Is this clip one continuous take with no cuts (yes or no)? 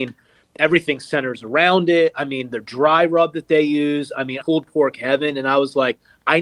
no